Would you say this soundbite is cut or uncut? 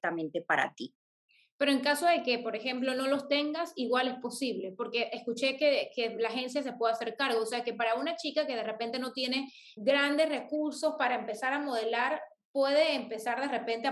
cut